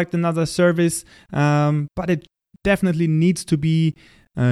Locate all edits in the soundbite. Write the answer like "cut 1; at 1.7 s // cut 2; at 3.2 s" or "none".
none